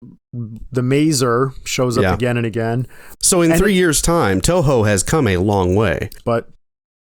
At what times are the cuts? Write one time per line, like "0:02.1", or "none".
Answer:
0:03.1
0:06.2